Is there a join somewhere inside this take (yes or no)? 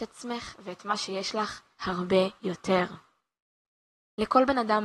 yes